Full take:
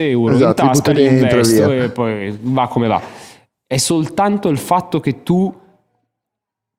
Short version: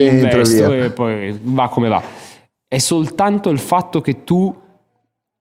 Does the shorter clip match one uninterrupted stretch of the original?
yes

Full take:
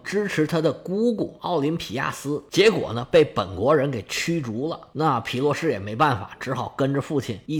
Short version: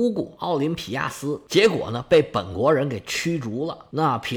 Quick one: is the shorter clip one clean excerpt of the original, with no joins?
yes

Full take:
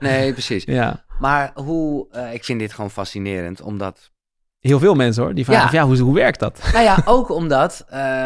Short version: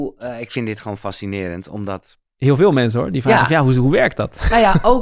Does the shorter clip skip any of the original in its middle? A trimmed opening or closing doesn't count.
yes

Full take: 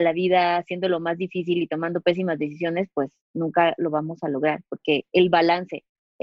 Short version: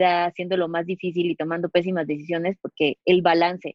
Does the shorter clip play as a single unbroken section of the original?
no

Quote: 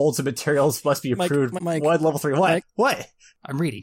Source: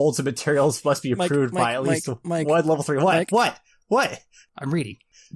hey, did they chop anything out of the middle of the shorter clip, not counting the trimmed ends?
yes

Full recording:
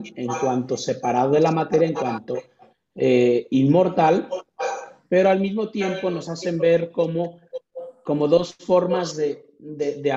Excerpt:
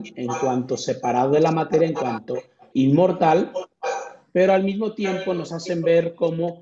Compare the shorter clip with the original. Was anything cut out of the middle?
yes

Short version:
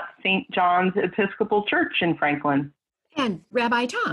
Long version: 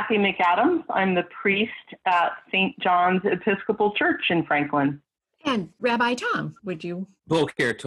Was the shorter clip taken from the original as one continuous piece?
yes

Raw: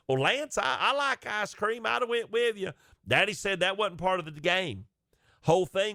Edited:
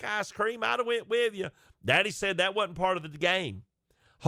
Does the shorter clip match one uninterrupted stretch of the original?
yes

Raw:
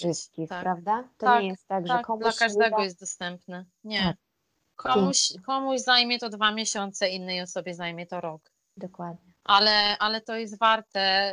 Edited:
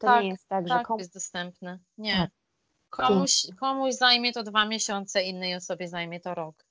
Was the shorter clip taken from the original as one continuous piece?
no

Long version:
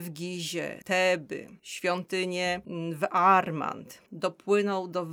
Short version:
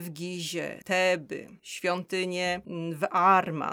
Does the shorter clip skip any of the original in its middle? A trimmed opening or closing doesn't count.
no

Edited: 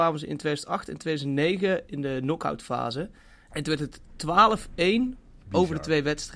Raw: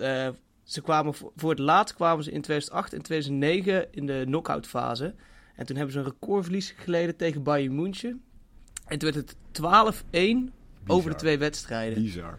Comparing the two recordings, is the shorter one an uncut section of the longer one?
no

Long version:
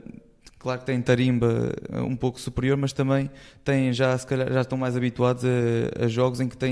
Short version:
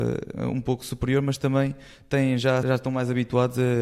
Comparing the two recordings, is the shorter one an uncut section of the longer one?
no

